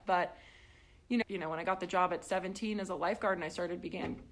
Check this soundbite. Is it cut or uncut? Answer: cut